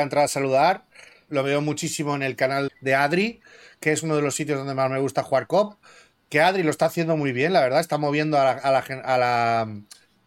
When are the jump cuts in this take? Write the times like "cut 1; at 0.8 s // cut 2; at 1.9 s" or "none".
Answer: cut 1; at 1.3 s // cut 2; at 2.7 s